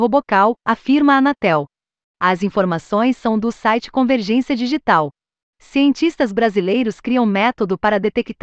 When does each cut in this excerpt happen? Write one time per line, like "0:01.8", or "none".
none